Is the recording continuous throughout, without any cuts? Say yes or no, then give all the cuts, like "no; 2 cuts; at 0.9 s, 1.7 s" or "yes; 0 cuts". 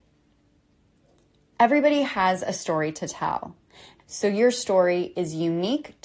no; 1 cut; at 4.0 s